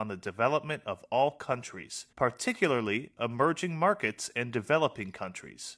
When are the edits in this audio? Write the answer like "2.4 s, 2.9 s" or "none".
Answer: 2.1 s